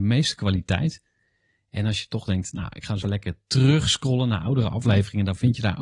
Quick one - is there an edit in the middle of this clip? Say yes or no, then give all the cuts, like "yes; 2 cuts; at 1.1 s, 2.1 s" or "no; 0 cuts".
yes; 1 cut; at 3.0 s